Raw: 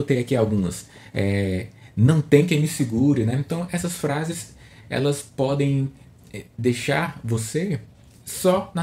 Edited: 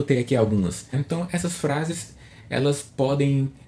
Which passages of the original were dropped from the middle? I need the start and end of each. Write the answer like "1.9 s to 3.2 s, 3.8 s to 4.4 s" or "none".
0.9 s to 3.3 s